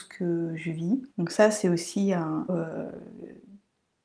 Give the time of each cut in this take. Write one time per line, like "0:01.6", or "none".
0:01.1
0:02.5